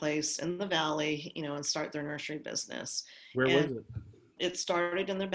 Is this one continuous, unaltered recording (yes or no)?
no